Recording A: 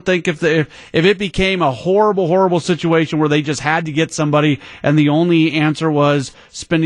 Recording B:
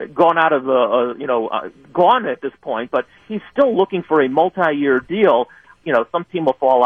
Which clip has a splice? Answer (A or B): B